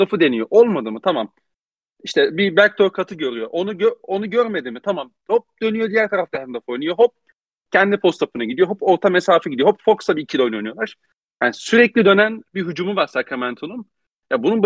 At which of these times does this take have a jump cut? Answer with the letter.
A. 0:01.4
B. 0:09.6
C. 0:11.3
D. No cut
D